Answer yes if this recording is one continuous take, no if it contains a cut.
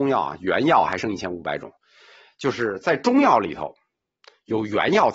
yes